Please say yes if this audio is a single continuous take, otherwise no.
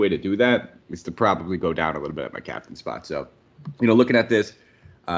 yes